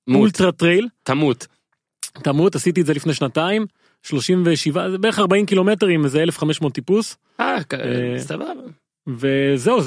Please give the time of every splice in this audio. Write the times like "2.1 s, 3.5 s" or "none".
none

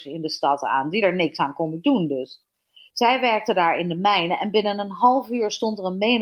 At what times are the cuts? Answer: none

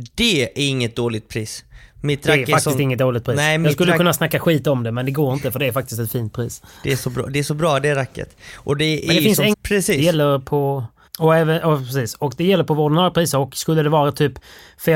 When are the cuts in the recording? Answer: 9.5 s

